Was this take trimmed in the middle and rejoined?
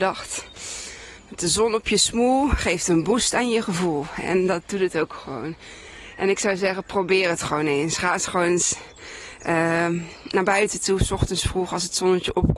no; 0 cuts

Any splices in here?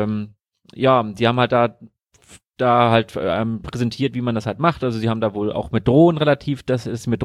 no; 0 cuts

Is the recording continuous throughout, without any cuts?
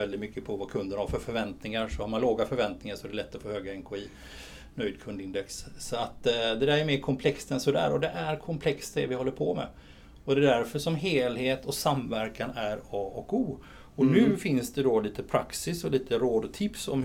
yes; 0 cuts

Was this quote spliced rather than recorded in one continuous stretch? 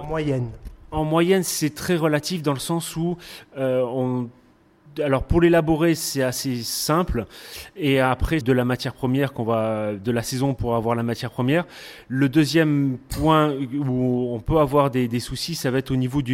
yes; 1 cut; at 8.4 s

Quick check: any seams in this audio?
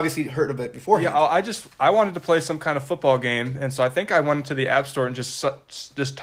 no; 0 cuts

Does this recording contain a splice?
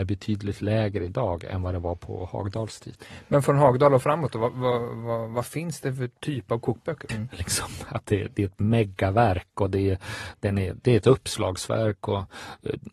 yes; 1 cut; at 7.1 s

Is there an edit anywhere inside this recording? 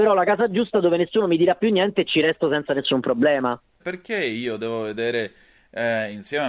yes; 1 cut; at 3.8 s

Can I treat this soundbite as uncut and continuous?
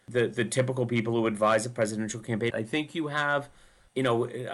no; 1 cut; at 2.5 s

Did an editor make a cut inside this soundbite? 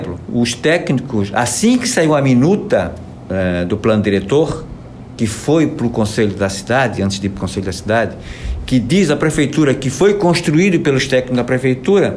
no; 0 cuts

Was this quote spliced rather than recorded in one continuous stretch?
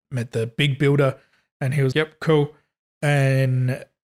yes; 1 cut; at 1.9 s

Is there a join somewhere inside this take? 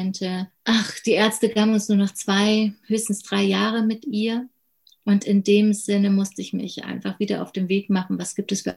no; 0 cuts

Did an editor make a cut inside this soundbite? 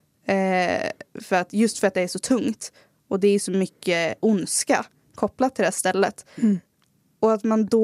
no; 0 cuts

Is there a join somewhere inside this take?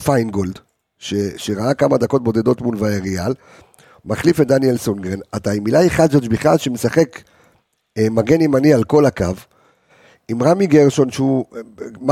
no; 0 cuts

